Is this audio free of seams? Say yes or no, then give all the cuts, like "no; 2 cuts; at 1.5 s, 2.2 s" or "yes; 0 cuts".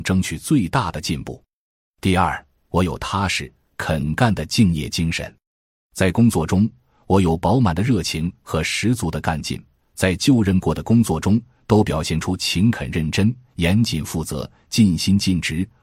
yes; 0 cuts